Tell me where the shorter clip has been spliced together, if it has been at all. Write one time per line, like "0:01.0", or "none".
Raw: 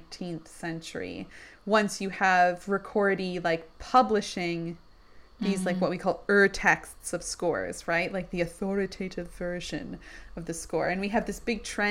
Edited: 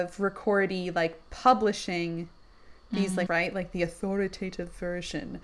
0:03.3